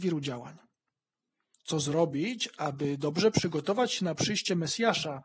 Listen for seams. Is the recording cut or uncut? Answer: cut